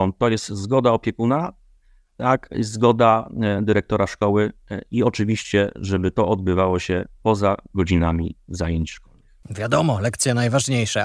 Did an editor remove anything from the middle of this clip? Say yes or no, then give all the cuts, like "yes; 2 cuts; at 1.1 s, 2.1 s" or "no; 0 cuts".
no; 0 cuts